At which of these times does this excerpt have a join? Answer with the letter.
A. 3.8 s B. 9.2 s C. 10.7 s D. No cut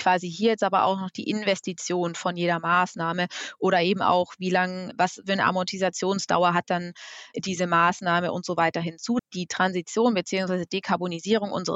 B